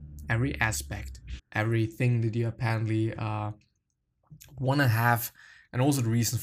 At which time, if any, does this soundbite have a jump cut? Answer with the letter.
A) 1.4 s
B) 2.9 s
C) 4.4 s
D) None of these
A